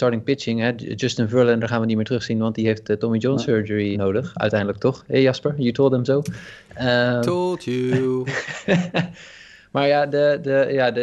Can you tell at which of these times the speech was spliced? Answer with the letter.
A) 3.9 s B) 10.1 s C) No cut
A